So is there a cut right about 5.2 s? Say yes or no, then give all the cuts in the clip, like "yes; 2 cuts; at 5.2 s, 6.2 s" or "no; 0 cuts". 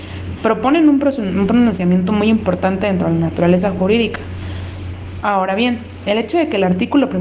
yes; 1 cut; at 5.2 s